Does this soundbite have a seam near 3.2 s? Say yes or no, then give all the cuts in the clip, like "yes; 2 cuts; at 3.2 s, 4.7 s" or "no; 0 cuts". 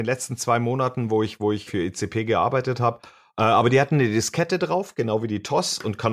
no; 1 cut; at 1.7 s